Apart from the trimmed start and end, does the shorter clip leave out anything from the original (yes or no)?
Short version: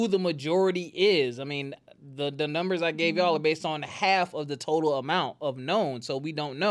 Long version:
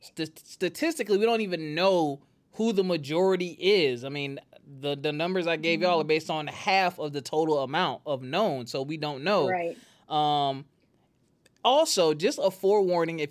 no